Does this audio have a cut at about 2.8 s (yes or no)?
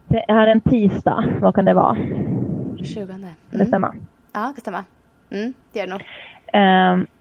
yes